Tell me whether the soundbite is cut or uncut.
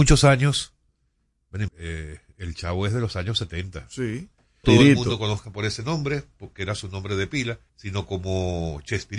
cut